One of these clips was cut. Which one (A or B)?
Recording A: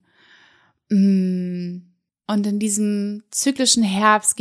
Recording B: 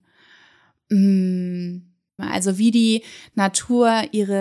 B